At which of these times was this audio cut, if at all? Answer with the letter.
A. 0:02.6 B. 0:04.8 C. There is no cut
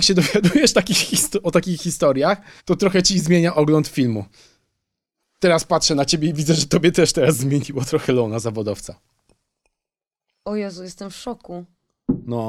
A